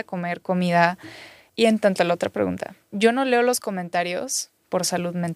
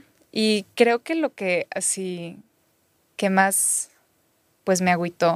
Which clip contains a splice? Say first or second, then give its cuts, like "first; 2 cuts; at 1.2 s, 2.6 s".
first; 2 cuts; at 1.5 s, 2.8 s